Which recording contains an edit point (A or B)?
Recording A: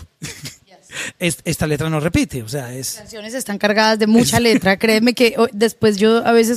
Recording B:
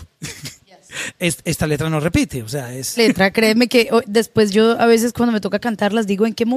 B